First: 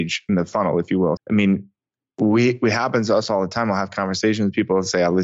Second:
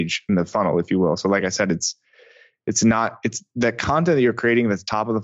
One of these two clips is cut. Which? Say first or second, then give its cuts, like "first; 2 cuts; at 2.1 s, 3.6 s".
first; 1 cut; at 1.2 s